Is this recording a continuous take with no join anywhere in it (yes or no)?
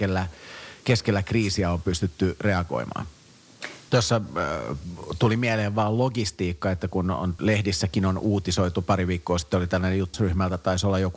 no